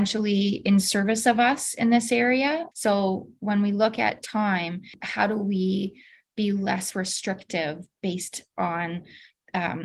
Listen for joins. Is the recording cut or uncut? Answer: cut